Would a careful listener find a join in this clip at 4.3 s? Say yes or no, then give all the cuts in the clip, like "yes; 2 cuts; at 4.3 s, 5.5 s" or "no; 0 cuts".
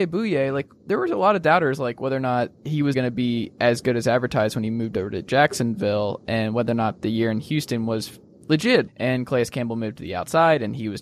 no; 2 cuts; at 2.9 s, 8.9 s